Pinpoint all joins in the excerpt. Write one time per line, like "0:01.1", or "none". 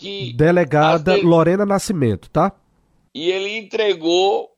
0:03.1

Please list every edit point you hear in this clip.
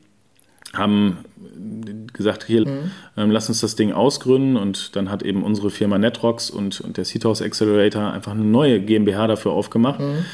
0:02.6

